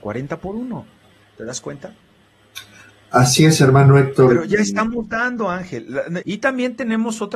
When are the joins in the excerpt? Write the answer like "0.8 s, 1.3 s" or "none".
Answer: 6.2 s